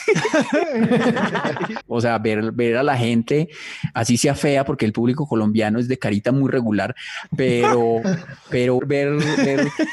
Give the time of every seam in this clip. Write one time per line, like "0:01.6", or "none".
0:01.8
0:08.8